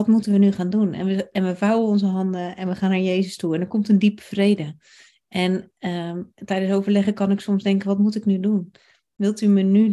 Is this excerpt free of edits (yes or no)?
yes